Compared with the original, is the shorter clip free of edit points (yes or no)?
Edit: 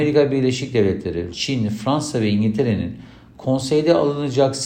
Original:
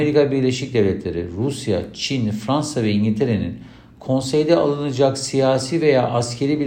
no